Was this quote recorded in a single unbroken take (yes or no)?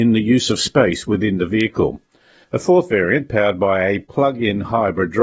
no